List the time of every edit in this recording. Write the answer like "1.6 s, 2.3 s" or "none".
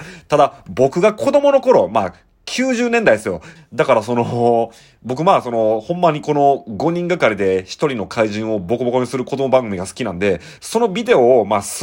3.6 s, 10.6 s